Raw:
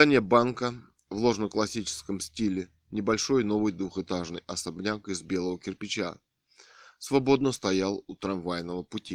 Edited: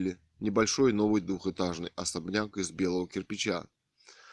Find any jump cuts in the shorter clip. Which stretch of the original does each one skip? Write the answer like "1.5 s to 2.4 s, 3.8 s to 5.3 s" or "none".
none